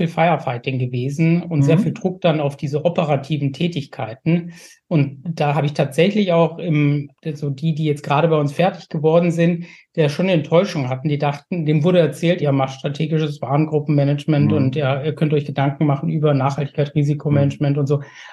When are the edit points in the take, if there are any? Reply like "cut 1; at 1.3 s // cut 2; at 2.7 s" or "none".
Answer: cut 1; at 12.4 s

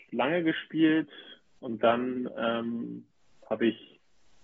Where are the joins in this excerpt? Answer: cut 1; at 1.6 s

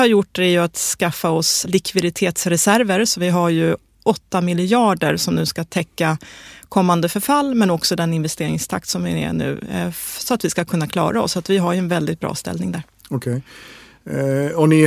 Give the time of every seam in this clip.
cut 1; at 1.6 s

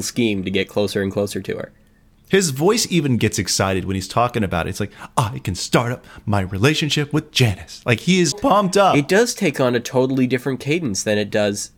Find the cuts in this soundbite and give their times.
cut 1; at 8.3 s

